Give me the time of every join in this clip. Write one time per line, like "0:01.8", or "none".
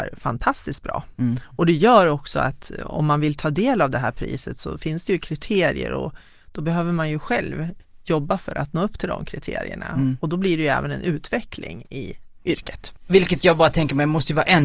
0:13.0